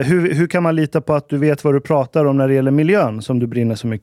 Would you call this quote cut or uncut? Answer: uncut